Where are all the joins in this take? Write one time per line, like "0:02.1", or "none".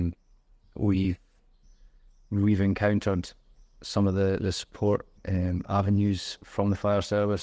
0:05.2